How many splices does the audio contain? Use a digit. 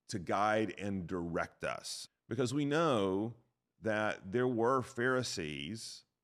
1